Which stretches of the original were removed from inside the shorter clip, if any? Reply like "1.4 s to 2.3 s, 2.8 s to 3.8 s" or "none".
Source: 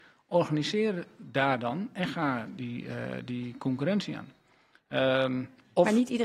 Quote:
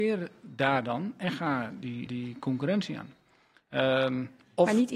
2.8 s to 3.3 s